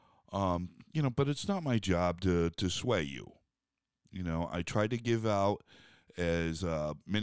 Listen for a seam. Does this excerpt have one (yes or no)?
no